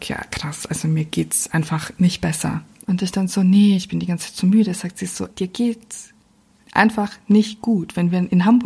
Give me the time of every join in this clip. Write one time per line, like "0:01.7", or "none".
0:02.8
0:05.3

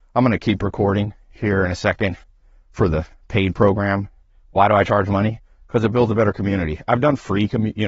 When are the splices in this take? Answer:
none

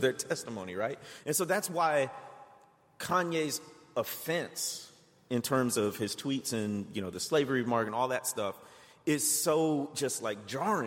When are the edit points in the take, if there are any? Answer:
none

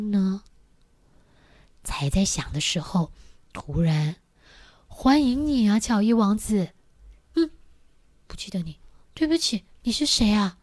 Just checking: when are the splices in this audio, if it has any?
0:07.3

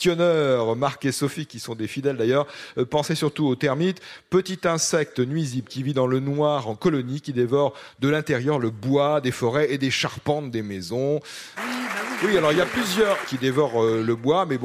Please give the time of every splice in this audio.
0:11.6
0:13.2

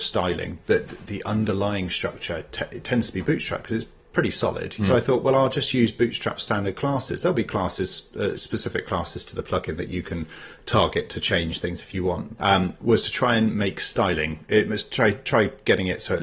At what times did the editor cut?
0:04.8
0:08.4
0:12.4

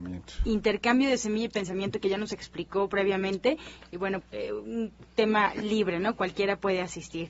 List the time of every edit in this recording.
0:04.2

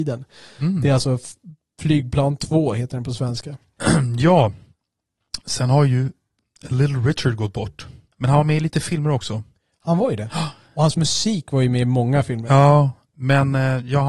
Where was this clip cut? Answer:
0:08.1

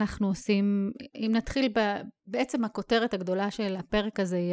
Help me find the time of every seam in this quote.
0:02.2

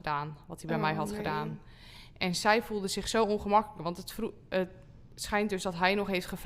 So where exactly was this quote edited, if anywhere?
none

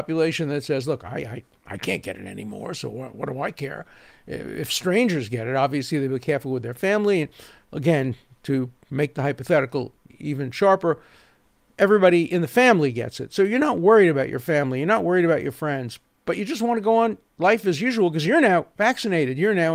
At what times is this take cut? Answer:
none

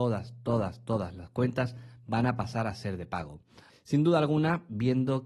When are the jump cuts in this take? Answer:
0:03.7

